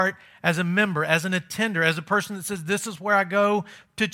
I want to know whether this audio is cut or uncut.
uncut